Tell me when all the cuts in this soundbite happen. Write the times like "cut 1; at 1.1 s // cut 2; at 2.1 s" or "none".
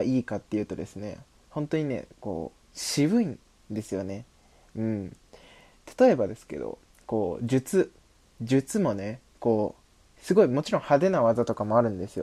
none

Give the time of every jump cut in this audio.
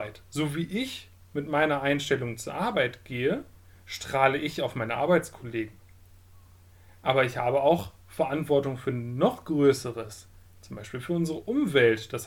none

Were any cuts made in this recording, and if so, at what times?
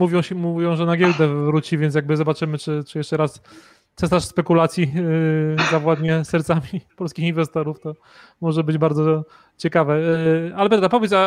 none

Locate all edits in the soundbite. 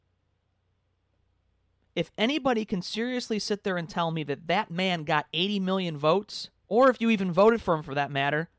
cut 1; at 6.6 s

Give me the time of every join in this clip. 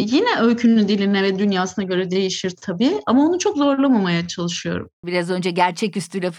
cut 1; at 5.0 s

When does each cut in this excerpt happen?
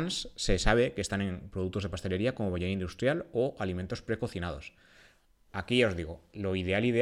none

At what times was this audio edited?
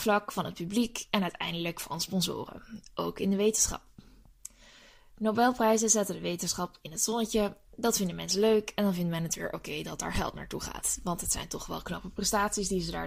none

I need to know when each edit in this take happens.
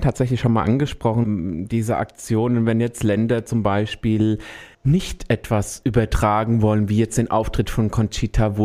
cut 1; at 1.2 s // cut 2; at 4.7 s

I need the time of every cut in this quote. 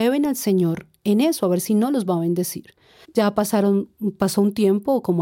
cut 1; at 3.0 s

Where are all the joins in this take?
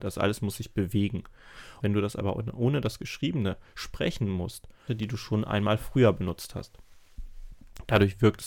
cut 1; at 1.8 s // cut 2; at 4.9 s

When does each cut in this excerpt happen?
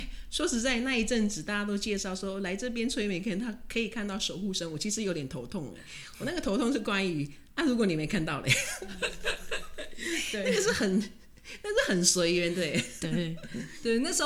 none

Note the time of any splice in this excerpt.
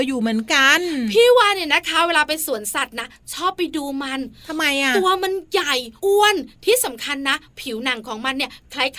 cut 1; at 6.0 s

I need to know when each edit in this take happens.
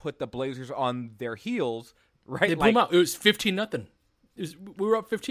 cut 1; at 2.2 s

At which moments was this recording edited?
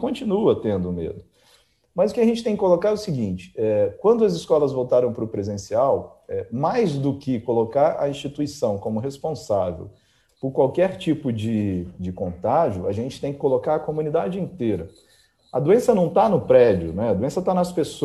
none

